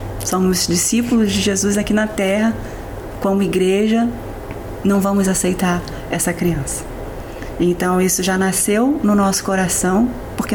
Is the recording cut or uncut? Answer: uncut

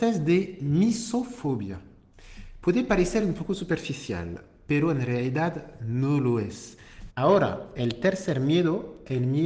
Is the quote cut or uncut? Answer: cut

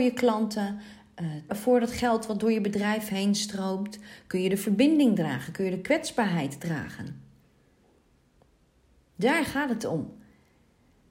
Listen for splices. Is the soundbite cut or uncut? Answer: cut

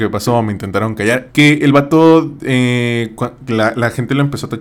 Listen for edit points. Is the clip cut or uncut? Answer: cut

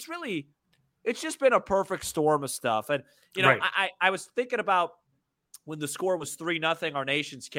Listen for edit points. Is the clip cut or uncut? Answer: uncut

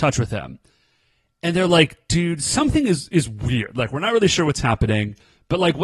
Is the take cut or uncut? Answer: uncut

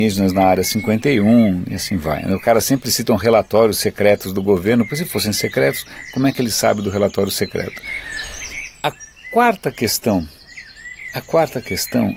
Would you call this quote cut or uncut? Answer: uncut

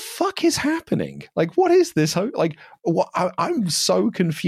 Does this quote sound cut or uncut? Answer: uncut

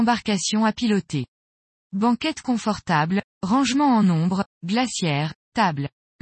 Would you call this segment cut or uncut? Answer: uncut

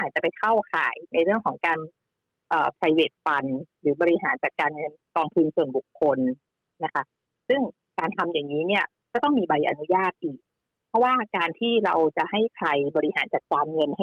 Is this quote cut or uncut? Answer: uncut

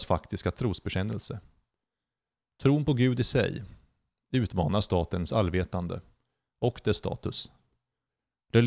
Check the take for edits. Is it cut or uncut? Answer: uncut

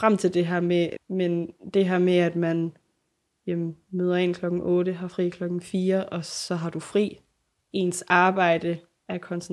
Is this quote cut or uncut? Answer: cut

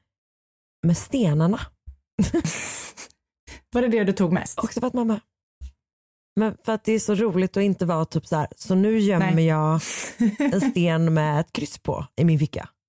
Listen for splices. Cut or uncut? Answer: uncut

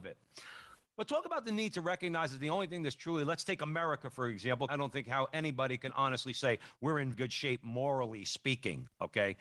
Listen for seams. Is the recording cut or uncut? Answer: cut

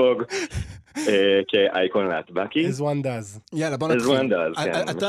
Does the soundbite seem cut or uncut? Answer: uncut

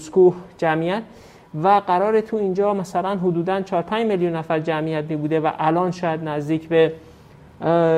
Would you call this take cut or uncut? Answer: uncut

